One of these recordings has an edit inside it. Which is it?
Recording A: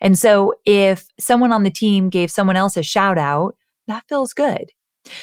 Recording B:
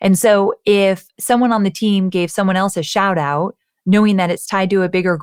A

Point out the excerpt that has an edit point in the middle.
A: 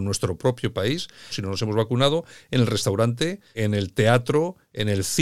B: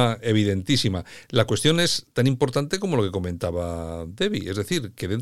A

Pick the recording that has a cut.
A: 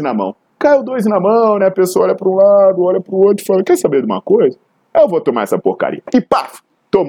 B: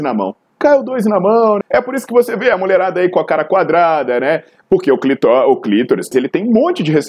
B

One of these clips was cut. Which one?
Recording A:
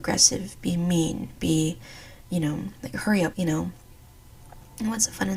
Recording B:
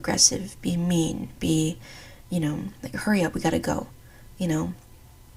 A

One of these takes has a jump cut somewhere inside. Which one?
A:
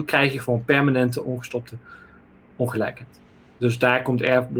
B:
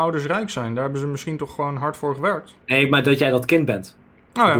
B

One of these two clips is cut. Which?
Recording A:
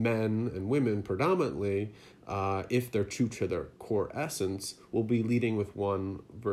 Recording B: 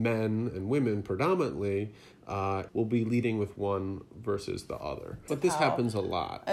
B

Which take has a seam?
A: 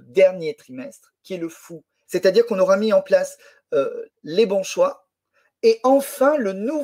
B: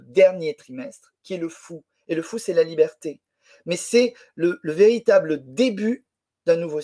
A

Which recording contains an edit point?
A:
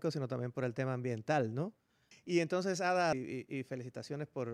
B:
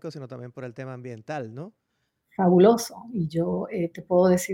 A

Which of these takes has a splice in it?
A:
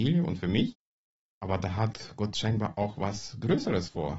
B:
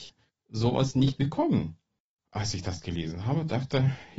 B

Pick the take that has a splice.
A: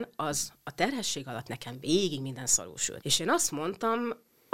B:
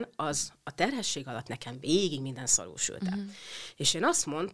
A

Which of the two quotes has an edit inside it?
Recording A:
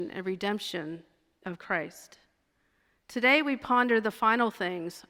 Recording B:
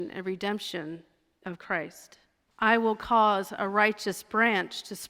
B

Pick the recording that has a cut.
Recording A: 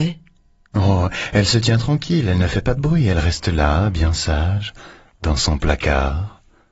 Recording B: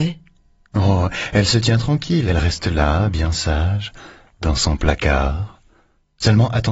B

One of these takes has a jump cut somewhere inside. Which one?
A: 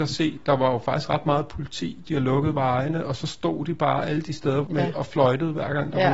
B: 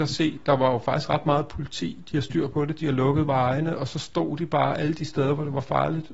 A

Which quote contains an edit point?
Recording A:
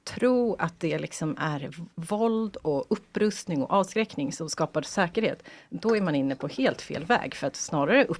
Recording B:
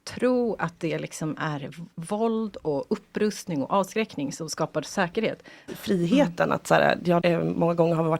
B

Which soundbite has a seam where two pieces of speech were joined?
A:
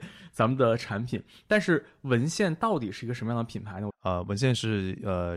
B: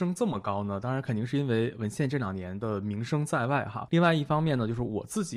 A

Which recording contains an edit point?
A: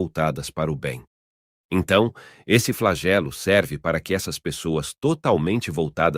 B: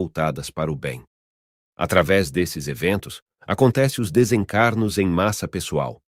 B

